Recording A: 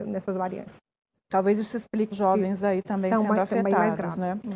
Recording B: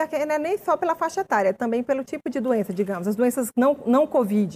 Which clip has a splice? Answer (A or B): A